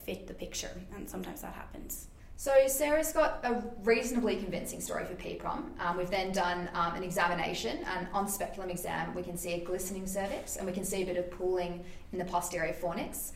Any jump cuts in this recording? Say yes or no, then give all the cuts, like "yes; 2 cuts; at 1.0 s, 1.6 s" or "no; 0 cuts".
no; 0 cuts